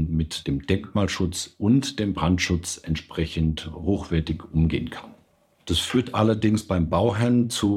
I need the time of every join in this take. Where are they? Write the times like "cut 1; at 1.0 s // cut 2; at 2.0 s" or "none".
cut 1; at 5.6 s